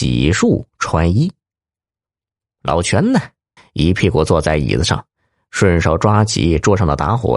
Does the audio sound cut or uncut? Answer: cut